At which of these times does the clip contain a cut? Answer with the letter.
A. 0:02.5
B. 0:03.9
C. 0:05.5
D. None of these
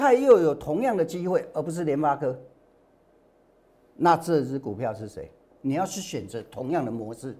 C